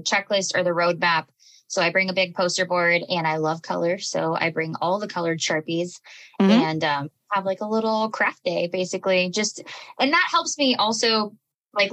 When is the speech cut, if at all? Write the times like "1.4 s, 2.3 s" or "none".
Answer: none